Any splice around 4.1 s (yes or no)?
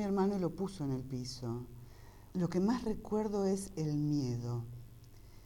no